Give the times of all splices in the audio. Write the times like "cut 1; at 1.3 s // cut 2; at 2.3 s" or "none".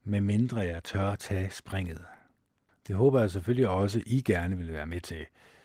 cut 1; at 2.7 s